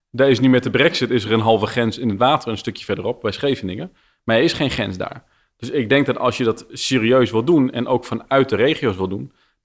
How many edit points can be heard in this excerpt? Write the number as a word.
zero